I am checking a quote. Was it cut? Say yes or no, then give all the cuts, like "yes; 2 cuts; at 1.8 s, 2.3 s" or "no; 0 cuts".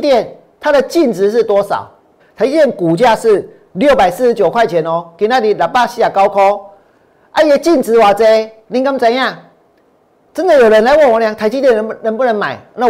yes; 1 cut; at 2.2 s